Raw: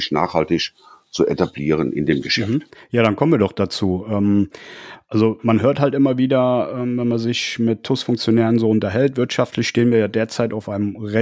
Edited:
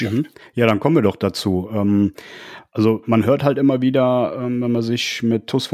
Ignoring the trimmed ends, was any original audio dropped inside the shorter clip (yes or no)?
no